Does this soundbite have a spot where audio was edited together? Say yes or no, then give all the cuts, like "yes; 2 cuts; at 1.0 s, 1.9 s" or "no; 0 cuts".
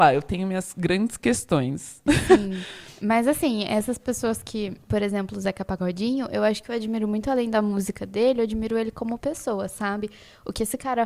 no; 0 cuts